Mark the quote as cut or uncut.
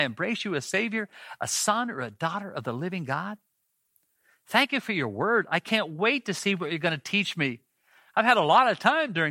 uncut